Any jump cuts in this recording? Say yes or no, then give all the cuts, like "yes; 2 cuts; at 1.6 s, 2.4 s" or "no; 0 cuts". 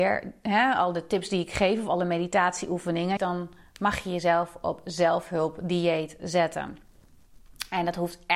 yes; 1 cut; at 3.2 s